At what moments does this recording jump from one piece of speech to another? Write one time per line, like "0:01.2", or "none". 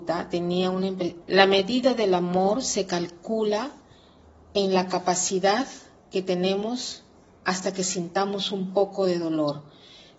0:01.2

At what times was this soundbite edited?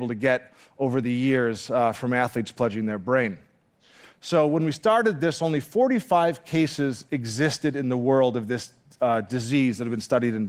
0:04.1

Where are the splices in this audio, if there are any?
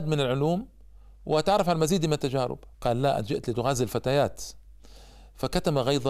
0:02.7

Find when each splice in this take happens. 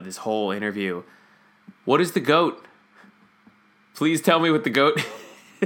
none

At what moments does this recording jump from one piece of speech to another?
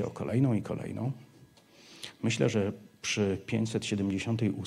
none

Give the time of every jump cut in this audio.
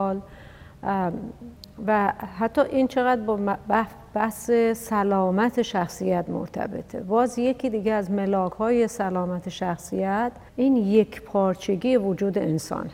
0:10.5

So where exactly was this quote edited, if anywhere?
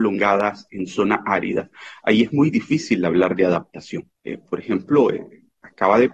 0:04.2

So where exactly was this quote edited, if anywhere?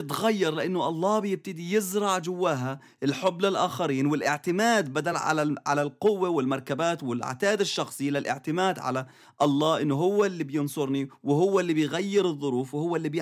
none

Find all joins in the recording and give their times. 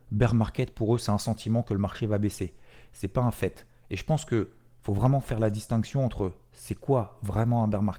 none

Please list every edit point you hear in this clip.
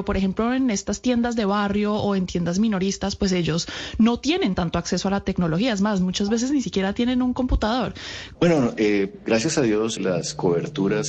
0:08.3
0:10.0

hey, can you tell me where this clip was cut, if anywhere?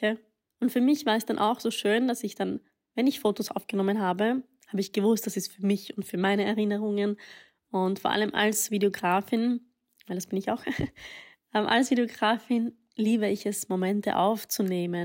none

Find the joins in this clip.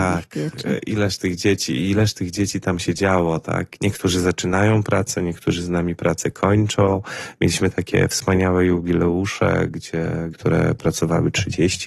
0:03.8
0:10.3

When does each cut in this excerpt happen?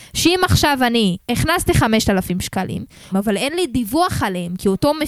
0:01.2
0:03.1

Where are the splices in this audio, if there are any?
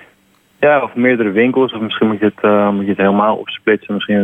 none

